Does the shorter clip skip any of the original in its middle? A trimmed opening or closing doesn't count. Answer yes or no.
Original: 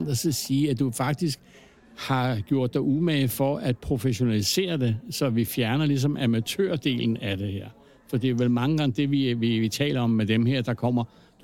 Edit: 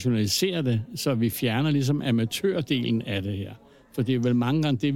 no